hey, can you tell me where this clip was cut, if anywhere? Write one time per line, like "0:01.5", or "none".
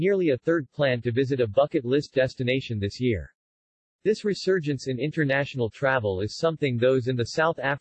none